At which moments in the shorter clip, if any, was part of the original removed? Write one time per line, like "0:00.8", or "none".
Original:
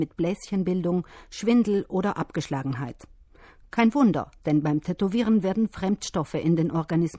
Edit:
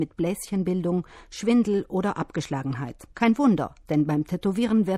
0:03.1